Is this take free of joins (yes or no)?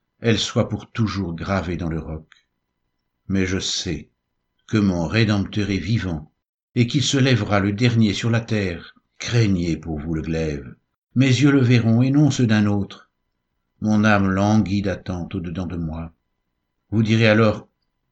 no